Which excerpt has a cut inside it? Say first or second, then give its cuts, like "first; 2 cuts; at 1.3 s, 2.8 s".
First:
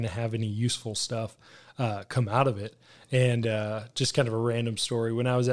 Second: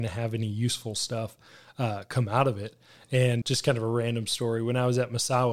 second; 1 cut; at 3.4 s